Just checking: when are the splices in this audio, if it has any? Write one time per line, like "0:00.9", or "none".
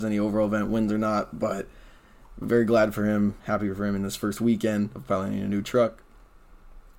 none